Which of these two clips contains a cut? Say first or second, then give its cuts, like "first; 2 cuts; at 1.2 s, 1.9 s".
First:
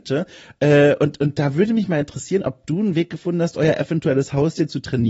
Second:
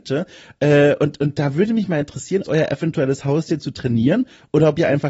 second; 1 cut; at 2.4 s